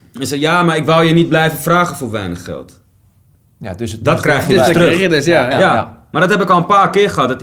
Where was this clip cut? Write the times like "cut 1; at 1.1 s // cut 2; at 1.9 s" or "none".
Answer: cut 1; at 5.5 s